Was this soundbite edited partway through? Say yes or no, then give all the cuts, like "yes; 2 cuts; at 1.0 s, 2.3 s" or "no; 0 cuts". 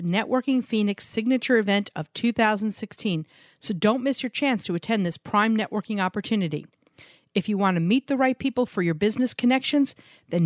no; 0 cuts